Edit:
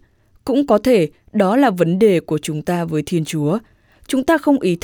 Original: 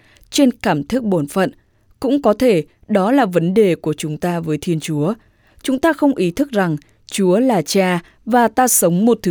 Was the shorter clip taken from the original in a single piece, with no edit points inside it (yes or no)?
yes